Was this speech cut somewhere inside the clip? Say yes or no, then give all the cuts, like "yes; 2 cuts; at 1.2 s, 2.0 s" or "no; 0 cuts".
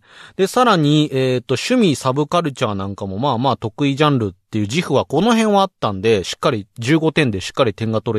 no; 0 cuts